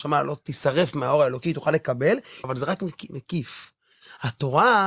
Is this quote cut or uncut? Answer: cut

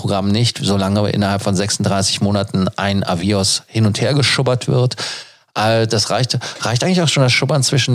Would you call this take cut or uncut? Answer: uncut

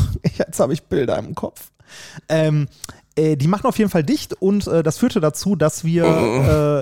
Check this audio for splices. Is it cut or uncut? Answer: uncut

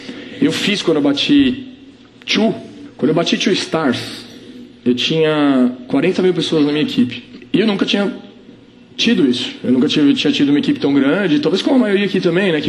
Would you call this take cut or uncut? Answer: uncut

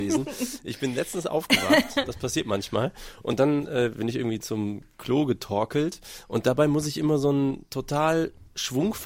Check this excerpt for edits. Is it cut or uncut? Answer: uncut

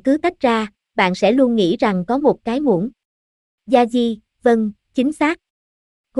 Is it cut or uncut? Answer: uncut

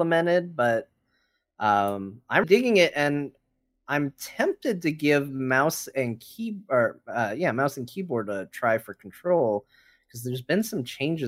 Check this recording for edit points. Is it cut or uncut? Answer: cut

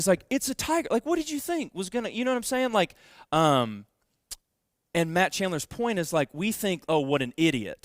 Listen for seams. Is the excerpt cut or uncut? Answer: uncut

